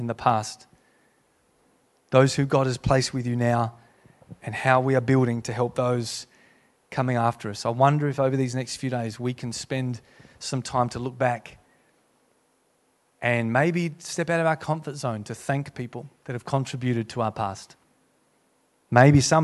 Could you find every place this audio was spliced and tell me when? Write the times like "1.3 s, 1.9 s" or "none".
none